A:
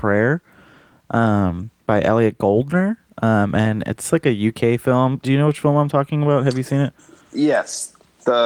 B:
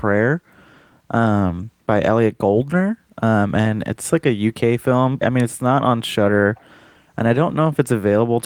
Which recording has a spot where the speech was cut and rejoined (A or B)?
B